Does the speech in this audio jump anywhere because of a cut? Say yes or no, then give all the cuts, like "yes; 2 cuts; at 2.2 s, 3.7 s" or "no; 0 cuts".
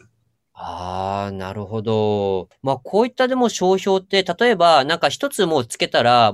no; 0 cuts